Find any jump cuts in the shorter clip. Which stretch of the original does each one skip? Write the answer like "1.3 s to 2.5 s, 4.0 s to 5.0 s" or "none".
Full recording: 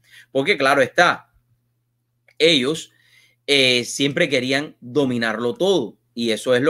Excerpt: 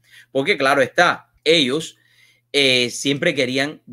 1.4 s to 2.3 s